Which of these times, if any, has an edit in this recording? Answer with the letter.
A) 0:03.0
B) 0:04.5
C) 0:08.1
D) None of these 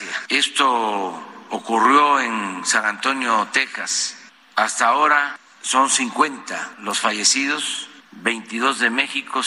D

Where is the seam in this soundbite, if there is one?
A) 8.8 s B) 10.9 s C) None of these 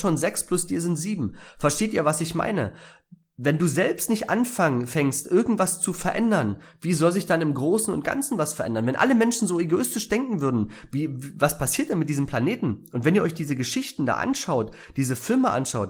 C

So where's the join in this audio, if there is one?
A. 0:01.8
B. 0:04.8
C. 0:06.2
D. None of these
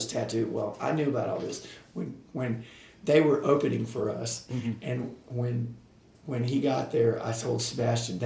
D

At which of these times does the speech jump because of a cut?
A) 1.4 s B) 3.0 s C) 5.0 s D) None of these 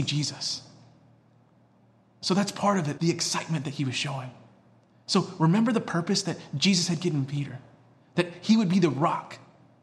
B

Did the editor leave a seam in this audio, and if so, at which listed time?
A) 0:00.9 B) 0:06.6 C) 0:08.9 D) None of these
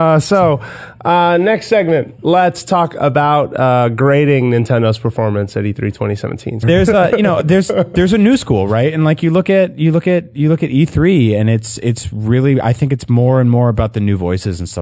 B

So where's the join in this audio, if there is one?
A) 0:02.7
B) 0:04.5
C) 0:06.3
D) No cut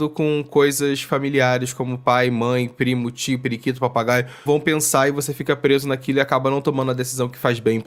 B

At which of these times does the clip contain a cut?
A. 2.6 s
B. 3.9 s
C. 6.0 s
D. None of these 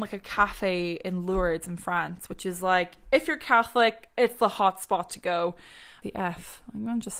C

